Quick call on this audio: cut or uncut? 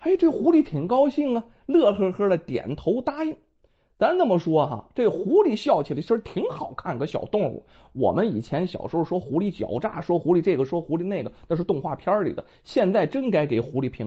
uncut